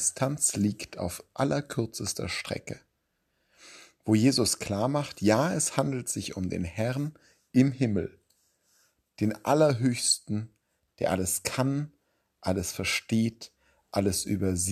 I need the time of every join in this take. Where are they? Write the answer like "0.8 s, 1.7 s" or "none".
10.9 s